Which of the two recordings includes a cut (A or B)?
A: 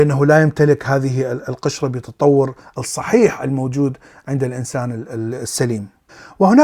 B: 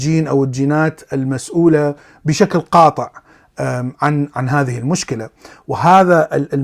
B